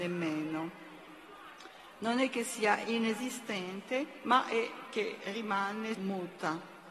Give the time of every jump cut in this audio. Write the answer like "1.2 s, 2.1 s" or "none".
5.9 s